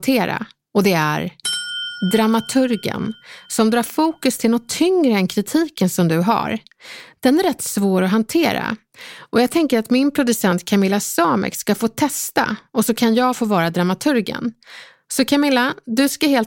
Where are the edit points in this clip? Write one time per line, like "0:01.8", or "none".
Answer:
none

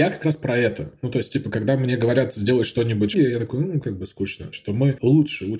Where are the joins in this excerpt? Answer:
0:03.1
0:04.5

